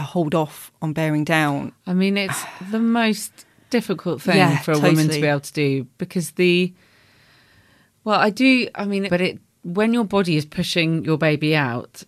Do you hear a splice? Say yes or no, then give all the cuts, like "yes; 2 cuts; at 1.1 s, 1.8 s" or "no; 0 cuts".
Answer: yes; 1 cut; at 9.1 s